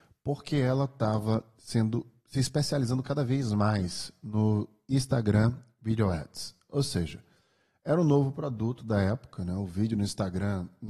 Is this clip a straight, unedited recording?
yes; 0 cuts

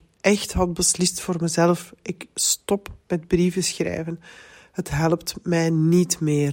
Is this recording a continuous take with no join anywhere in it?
yes; 0 cuts

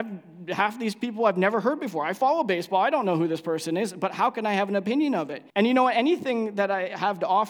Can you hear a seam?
yes; 1 cut; at 5.5 s

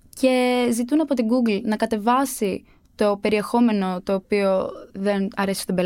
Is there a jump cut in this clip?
no; 0 cuts

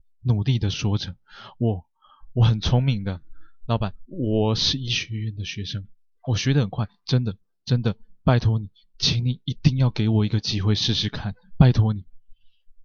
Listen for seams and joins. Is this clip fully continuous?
yes; 0 cuts

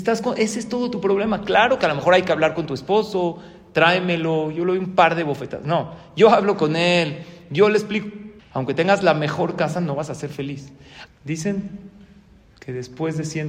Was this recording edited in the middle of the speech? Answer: yes; 2 cuts; at 8.4 s, 11.1 s

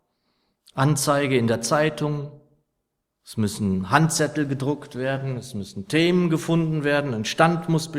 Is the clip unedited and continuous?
yes; 0 cuts

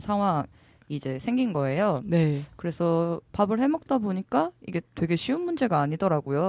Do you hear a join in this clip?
no; 0 cuts

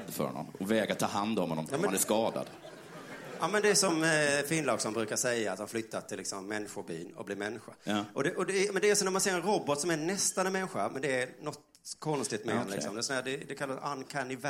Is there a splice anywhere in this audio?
no; 0 cuts

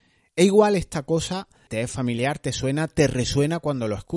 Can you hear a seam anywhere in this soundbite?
yes; 1 cut; at 1.7 s

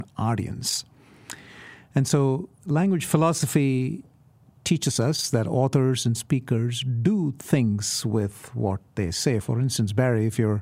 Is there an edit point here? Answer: no; 0 cuts

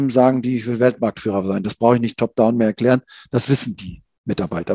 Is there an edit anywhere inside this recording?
no; 0 cuts

